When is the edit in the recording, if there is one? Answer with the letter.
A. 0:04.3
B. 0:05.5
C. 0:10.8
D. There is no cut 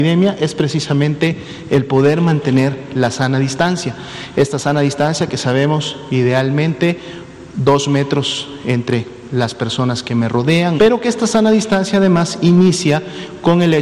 C